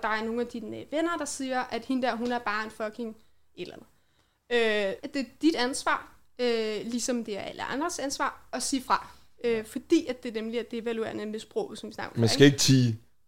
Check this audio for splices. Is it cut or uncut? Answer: cut